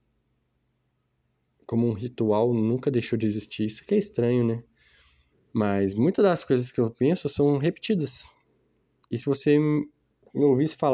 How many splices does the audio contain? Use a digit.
1